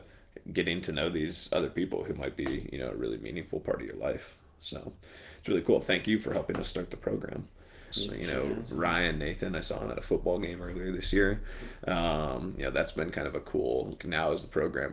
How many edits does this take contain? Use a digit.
3